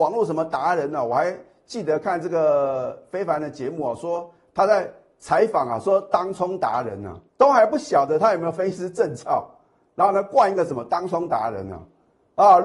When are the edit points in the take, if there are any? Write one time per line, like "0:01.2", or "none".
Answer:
0:07.3